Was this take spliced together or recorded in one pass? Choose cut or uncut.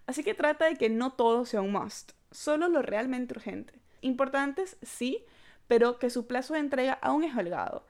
cut